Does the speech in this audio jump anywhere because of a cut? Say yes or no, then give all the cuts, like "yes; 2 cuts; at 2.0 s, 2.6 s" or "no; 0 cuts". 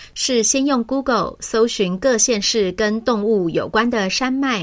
no; 0 cuts